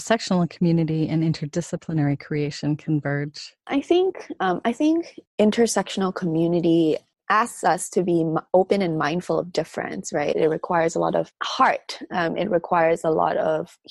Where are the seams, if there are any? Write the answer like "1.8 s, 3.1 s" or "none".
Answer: 3.7 s, 10.3 s